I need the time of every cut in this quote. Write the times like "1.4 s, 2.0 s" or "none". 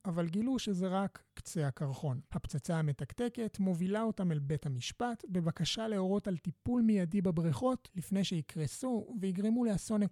2.3 s

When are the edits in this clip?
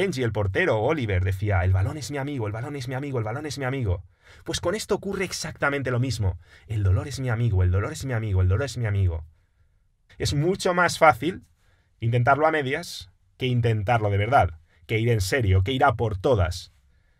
10.1 s

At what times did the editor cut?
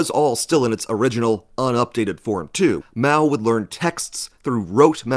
2.8 s

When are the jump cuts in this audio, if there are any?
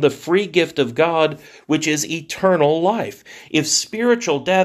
none

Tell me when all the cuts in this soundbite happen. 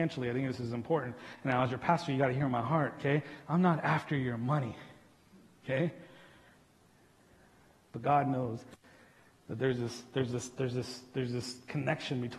none

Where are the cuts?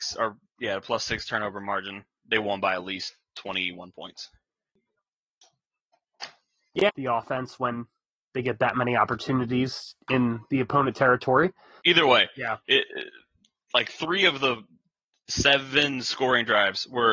6.9 s, 11.8 s

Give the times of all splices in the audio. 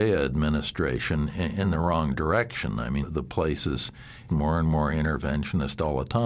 3.0 s, 4.3 s

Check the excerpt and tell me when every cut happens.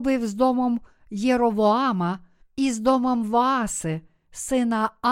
2.4 s

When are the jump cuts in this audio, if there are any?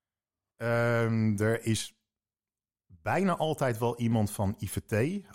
none

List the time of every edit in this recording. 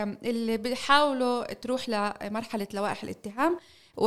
none

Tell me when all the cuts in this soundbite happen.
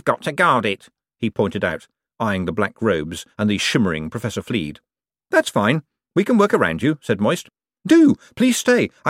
none

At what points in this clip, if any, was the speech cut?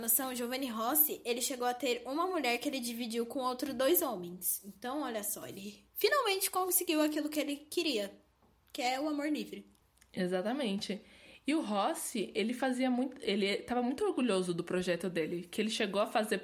none

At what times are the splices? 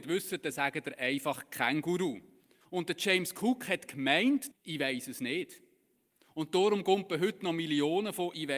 2.6 s, 4.5 s

